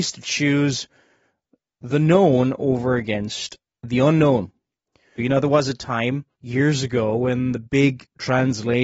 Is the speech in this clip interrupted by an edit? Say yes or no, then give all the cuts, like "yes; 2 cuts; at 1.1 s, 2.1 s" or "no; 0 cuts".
yes; 2 cuts; at 5.2 s, 6.3 s